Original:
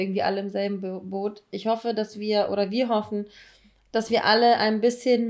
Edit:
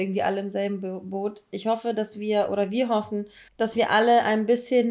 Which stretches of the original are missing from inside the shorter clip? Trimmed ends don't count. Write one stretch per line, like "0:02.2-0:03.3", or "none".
0:03.5-0:03.8